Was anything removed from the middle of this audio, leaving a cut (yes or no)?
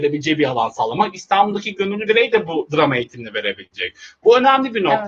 no